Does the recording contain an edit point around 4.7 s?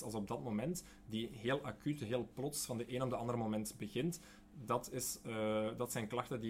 no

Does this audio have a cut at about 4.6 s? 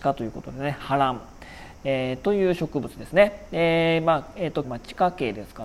yes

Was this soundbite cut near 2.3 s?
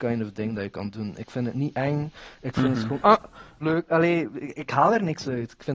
no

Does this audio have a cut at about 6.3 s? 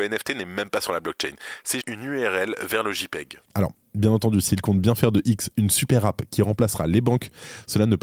no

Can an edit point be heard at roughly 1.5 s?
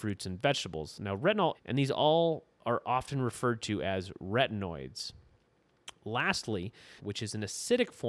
yes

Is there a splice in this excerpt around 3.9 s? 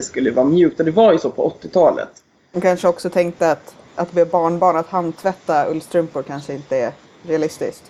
yes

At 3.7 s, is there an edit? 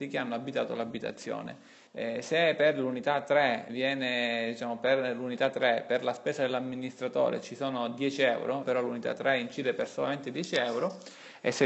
yes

